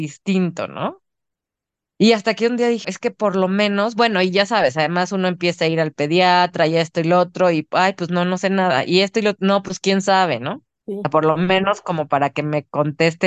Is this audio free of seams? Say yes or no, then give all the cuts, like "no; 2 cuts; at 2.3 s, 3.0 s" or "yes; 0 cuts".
no; 2 cuts; at 2.8 s, 10.8 s